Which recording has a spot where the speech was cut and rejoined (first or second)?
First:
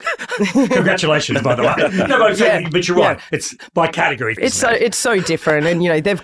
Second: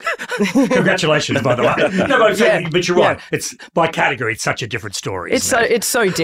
first